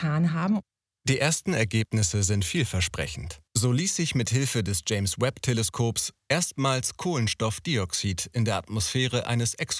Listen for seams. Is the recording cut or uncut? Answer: cut